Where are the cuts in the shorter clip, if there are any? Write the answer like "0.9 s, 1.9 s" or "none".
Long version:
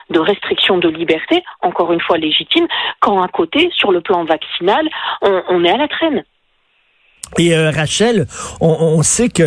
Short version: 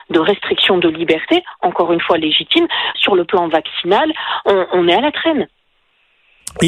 2.9 s

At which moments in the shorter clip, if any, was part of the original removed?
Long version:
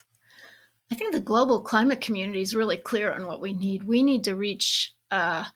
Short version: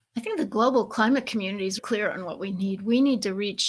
1.8 s

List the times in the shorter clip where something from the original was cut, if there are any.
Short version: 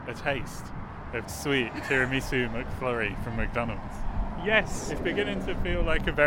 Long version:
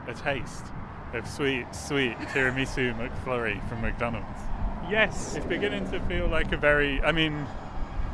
1.2 s

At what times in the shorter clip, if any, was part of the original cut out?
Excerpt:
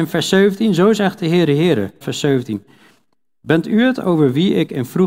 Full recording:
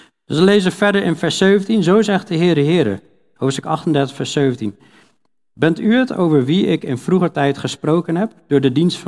2.0 s

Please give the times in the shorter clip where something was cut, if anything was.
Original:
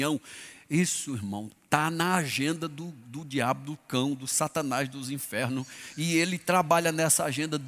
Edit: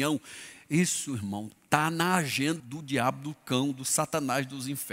2.6 s

